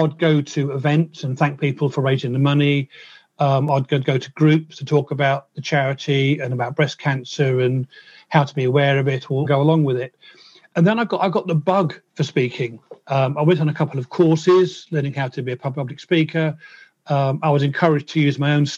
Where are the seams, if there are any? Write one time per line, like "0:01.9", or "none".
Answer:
0:09.4